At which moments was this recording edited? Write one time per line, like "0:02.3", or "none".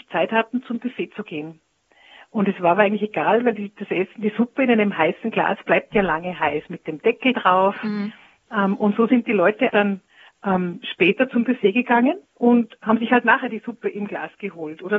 0:09.7
0:12.3